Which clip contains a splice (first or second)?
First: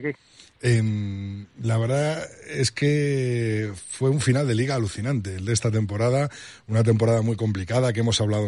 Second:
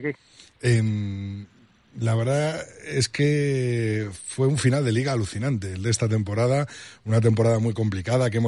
first